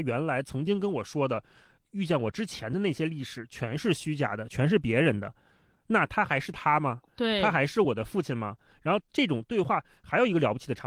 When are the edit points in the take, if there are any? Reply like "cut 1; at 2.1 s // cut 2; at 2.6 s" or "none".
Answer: none